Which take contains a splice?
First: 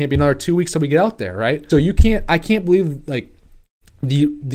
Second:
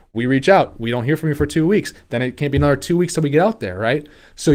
first; 1 cut; at 1.7 s

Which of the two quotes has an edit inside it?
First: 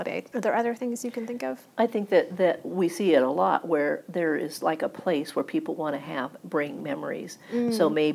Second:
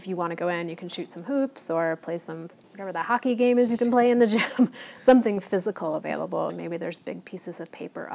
second; 1 cut; at 6.5 s

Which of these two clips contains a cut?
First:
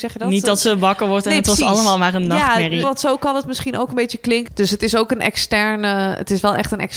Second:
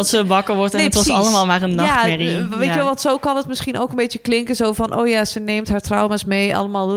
first; 2 cuts; at 2.8 s, 4.5 s

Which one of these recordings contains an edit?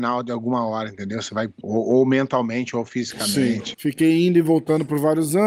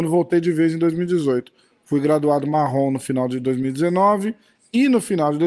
first; 2 cuts; at 1.6 s, 3.7 s

